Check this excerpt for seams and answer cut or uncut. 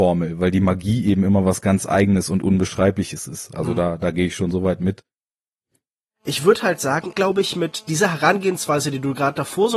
cut